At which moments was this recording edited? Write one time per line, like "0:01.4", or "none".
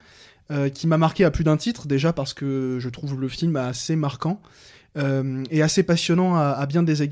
none